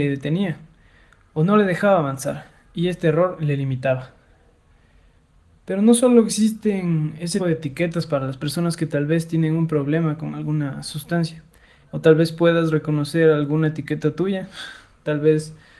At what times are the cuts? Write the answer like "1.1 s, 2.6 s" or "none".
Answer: 7.4 s, 11.9 s

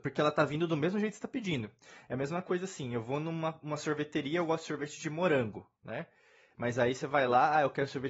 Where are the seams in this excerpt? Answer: none

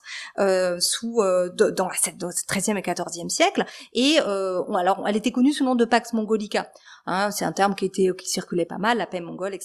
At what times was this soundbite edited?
none

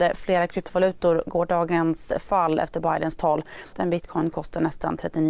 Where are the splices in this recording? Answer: 3.7 s

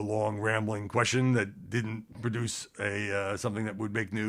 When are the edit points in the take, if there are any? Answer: none

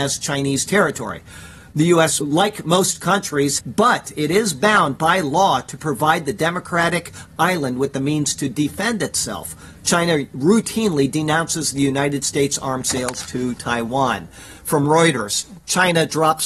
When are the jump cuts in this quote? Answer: 3.6 s

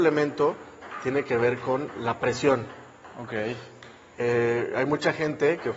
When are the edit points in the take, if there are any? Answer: none

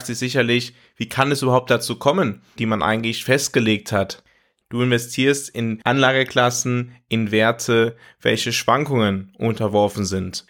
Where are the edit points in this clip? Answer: 2.6 s, 4.6 s

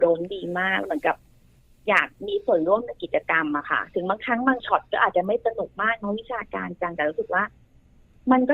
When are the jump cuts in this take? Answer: none

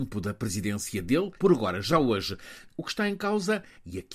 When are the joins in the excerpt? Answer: 1.4 s, 2.7 s

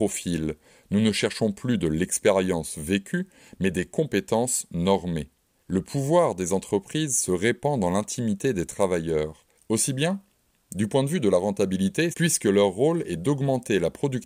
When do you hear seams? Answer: 9.6 s, 12.1 s

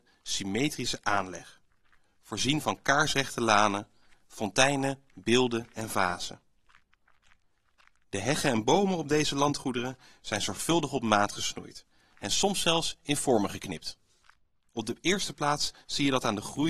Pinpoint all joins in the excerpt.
14.7 s

